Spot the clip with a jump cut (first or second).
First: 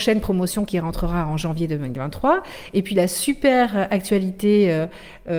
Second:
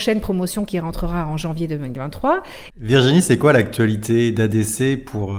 second